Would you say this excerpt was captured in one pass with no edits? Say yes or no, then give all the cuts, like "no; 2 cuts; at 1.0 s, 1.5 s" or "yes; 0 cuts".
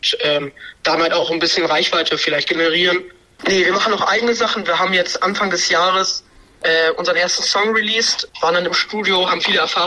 no; 2 cuts; at 3.4 s, 8.3 s